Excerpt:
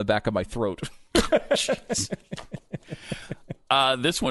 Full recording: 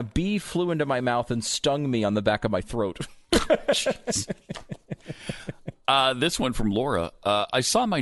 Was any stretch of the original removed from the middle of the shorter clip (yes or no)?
no